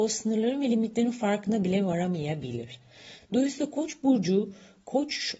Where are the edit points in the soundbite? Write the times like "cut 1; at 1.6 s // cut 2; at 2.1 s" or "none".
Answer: none